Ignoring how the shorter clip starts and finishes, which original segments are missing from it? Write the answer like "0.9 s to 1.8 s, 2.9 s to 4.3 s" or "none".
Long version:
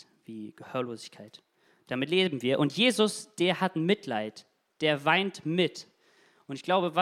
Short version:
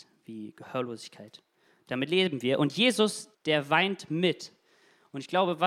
3.3 s to 4.7 s